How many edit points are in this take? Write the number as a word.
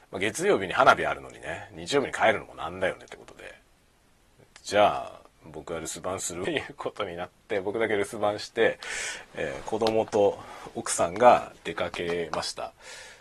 one